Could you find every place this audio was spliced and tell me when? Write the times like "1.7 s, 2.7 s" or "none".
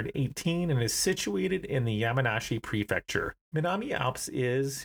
3.4 s

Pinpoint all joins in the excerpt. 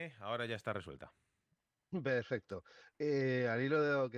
none

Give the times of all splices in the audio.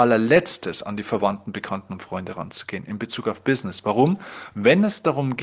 4.5 s

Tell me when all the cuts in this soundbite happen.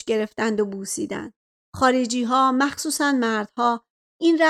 1.6 s

